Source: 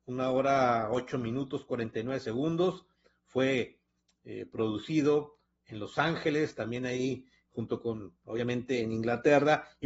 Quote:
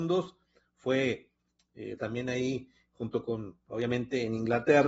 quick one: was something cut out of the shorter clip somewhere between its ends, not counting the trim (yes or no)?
yes